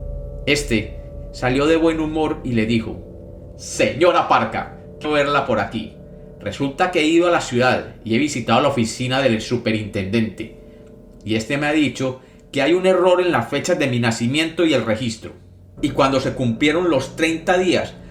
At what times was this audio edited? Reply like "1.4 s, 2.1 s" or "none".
5.0 s, 15.8 s